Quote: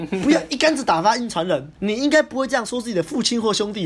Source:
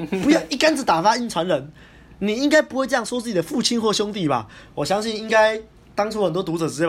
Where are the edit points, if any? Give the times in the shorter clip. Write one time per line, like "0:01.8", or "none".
0:01.7